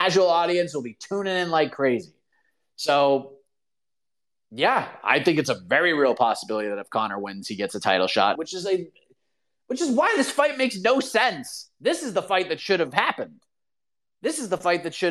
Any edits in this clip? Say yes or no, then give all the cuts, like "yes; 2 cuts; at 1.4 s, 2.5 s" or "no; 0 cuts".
yes; 2 cuts; at 8.4 s, 11.8 s